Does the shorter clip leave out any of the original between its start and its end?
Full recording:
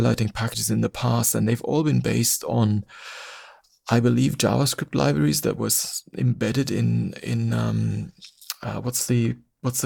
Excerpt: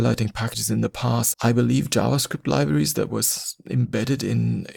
yes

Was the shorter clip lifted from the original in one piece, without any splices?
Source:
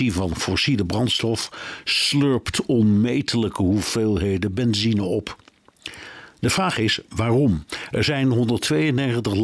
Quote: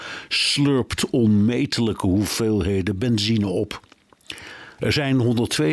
no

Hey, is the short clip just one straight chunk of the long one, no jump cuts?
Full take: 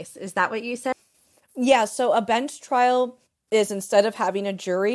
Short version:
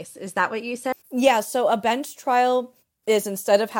no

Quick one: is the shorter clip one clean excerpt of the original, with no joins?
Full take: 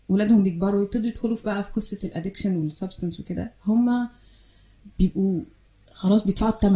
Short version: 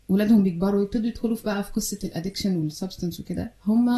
yes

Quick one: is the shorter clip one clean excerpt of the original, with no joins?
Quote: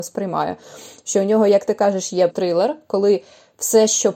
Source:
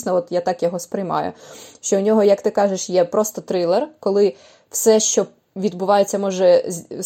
no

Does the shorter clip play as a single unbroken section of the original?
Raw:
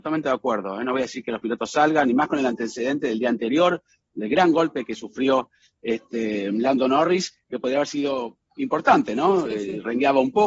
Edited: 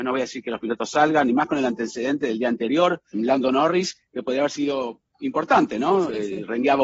no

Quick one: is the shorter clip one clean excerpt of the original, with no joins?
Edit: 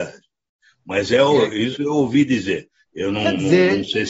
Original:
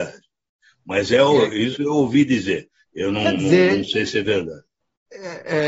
yes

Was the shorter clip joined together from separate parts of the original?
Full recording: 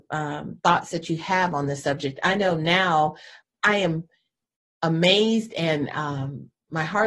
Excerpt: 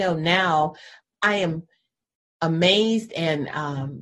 no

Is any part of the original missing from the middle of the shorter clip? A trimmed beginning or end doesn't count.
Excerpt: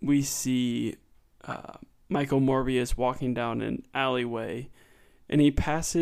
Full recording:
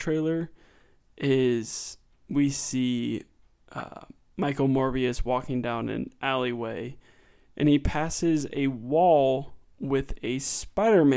no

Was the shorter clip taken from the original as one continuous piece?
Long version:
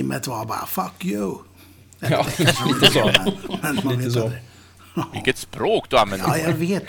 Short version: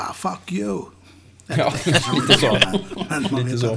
yes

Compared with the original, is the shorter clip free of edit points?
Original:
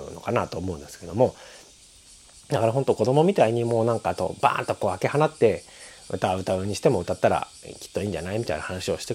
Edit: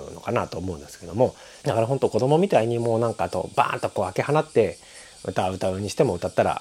no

